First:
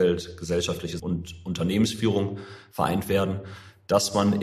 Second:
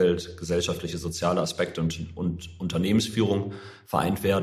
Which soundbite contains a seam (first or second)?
first